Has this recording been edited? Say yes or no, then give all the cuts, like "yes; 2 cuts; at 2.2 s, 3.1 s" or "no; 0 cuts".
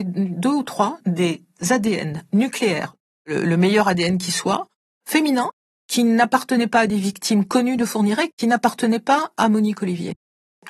no; 0 cuts